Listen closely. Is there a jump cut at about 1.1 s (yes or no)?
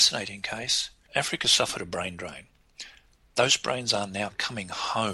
yes